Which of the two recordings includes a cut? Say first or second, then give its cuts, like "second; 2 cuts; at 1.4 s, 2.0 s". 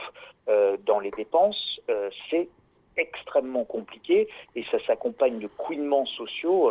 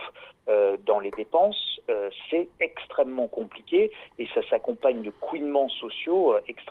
second; 1 cut; at 2.5 s